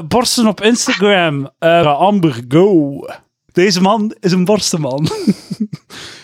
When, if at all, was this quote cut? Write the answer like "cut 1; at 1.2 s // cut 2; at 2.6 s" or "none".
cut 1; at 1.8 s // cut 2; at 3.5 s